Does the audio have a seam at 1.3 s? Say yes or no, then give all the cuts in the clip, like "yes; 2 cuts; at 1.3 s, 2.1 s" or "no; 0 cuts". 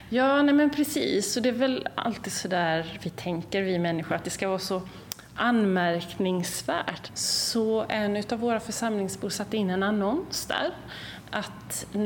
no; 1 cut; at 7.1 s